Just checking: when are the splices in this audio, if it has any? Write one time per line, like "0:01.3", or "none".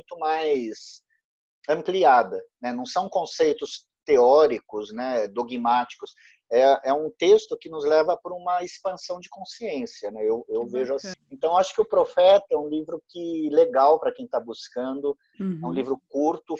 0:11.1
0:15.3